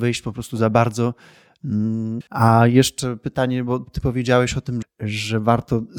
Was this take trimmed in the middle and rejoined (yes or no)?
yes